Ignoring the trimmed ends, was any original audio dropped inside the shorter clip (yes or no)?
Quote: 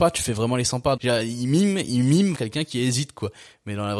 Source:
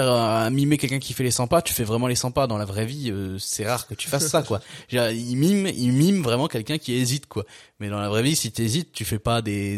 yes